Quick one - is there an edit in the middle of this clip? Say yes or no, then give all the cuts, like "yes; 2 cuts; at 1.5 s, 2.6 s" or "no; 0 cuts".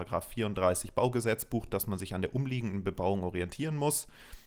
no; 0 cuts